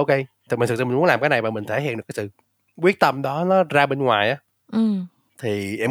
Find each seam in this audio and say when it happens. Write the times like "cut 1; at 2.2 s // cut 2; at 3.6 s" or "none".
none